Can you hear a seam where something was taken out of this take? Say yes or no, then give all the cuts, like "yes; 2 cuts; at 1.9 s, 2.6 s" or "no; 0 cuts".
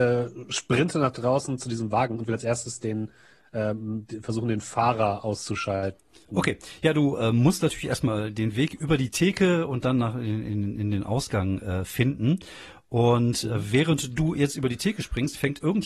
no; 0 cuts